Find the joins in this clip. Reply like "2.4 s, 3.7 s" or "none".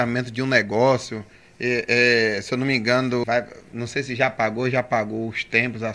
3.2 s